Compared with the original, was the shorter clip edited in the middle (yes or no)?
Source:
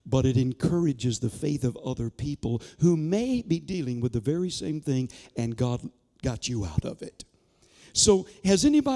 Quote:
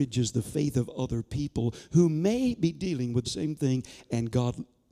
yes